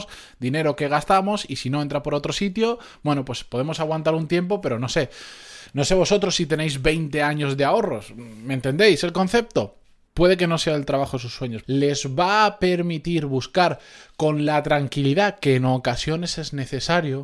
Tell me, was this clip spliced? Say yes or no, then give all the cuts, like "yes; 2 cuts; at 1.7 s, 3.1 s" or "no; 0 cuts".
yes; 2 cuts; at 10.1 s, 11.6 s